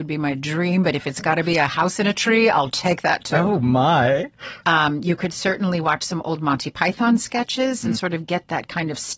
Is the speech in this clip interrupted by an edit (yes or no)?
yes